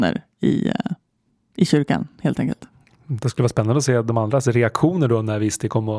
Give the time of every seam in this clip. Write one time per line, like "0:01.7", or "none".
none